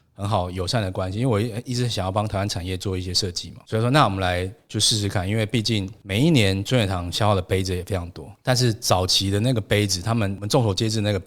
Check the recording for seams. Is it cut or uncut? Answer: cut